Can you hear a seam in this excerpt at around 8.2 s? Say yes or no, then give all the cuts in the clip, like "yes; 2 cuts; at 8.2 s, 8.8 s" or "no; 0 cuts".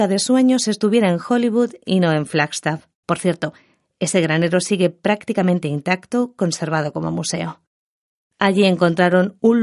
yes; 2 cuts; at 3.0 s, 8.2 s